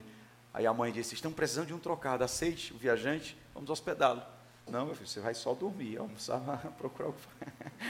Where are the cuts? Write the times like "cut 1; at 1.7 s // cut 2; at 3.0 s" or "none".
cut 1; at 4.7 s